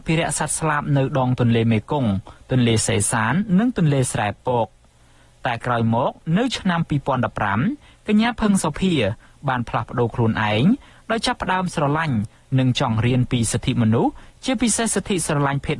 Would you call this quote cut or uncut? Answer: uncut